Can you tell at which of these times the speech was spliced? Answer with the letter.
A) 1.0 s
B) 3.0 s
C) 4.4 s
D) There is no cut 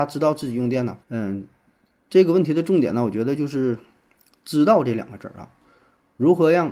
A